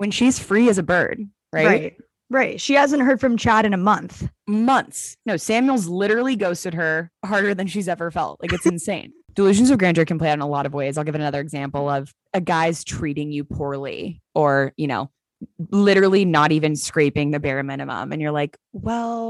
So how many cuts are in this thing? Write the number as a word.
zero